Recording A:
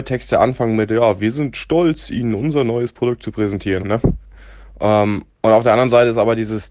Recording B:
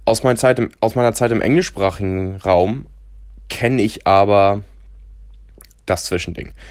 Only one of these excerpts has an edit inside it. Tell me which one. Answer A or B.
A